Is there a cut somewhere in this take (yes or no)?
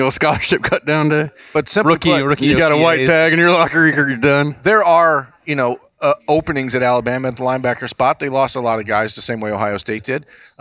no